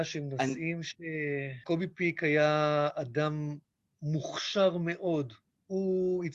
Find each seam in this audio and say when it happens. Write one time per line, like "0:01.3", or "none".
0:01.6